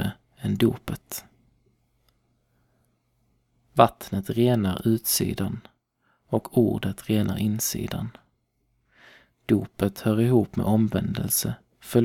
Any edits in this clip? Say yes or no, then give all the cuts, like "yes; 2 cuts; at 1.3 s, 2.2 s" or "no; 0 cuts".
no; 0 cuts